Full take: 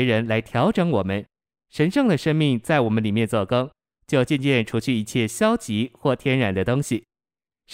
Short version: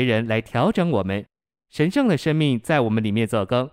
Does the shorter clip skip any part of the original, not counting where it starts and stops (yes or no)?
no